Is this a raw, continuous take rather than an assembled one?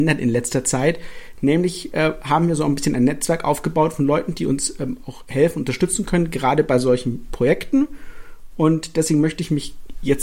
yes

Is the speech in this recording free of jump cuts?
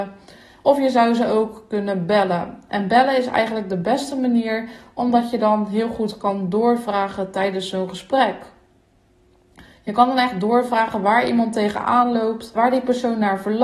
no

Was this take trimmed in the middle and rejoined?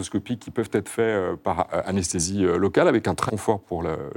yes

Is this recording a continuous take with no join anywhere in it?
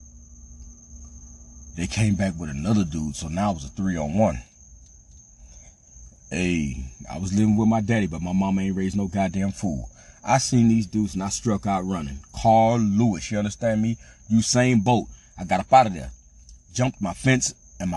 yes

